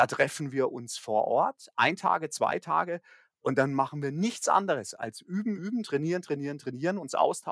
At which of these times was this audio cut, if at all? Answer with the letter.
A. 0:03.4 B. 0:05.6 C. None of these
B